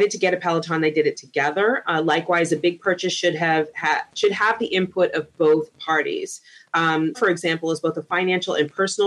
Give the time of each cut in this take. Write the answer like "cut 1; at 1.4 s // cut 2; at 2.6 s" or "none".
cut 1; at 7.1 s

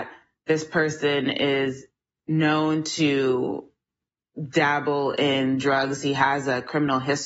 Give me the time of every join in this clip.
none

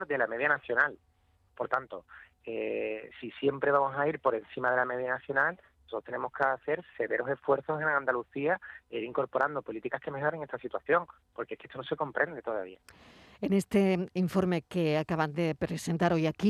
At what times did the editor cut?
cut 1; at 1.5 s

